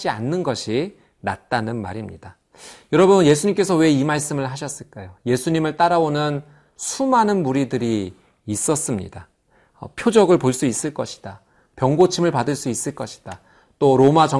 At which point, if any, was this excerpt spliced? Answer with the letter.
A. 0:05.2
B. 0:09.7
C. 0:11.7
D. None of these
B